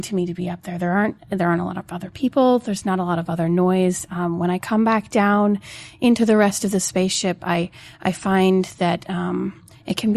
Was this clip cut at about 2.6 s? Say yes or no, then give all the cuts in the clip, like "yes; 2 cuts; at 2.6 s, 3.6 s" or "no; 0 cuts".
no; 0 cuts